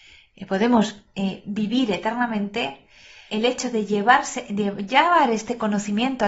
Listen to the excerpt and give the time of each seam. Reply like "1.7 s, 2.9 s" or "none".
3.3 s